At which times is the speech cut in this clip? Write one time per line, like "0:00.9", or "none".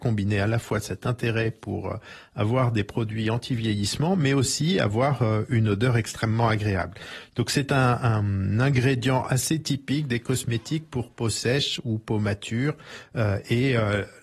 none